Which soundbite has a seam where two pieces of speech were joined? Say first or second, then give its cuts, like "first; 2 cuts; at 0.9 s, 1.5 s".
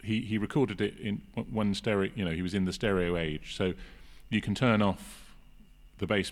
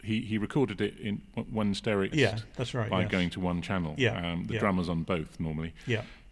second; 1 cut; at 2.1 s